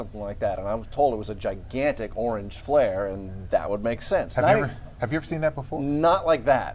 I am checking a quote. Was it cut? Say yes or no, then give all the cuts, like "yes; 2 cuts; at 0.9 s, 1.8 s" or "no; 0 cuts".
no; 0 cuts